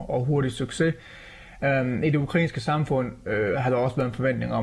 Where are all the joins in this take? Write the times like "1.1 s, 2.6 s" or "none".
none